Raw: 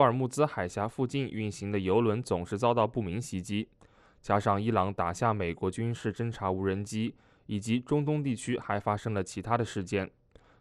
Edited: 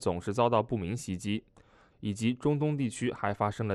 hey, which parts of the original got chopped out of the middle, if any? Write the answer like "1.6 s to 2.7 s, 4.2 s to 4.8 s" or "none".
4.2 s to 7.4 s